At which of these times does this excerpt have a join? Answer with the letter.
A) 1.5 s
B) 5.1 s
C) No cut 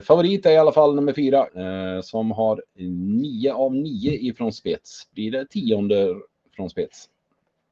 A